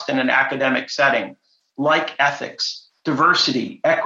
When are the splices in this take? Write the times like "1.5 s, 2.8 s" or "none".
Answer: none